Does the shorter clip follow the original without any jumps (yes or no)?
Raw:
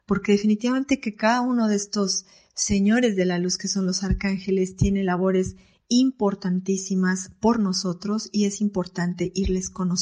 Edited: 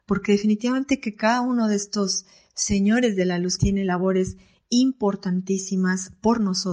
no